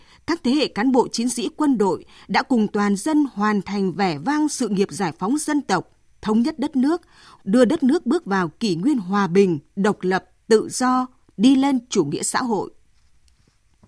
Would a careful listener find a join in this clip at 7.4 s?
yes; 1 cut; at 7.4 s

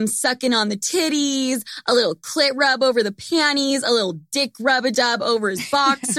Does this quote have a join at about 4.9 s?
yes; 1 cut; at 4.9 s

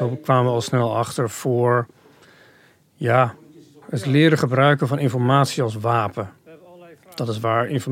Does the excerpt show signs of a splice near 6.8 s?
no; 1 cut; at 3.8 s

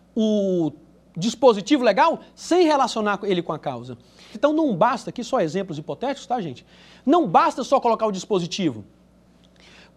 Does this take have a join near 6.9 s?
no; 1 cut; at 4.3 s

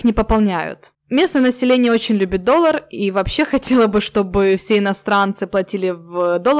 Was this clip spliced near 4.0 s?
no; 0 cuts

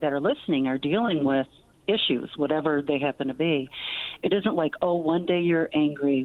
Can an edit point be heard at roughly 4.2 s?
yes; 1 cut; at 4.2 s

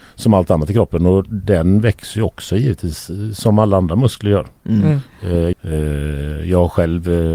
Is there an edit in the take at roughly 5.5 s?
yes; 1 cut; at 5.5 s

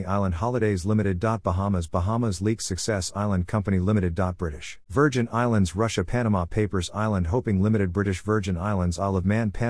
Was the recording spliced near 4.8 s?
yes; 1 cut; at 4.8 s

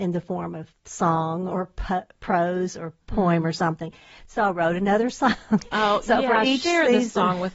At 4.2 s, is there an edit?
no; 0 cuts

